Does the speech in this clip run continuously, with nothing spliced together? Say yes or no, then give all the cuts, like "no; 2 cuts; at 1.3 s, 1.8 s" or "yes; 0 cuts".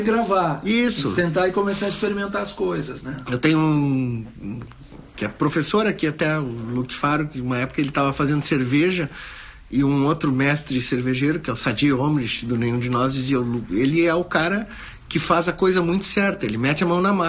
yes; 0 cuts